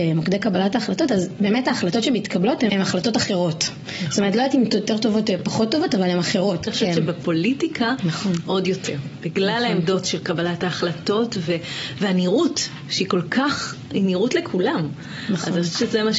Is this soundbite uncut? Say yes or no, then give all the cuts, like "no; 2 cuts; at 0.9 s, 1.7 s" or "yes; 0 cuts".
no; 2 cuts; at 2.7 s, 6.7 s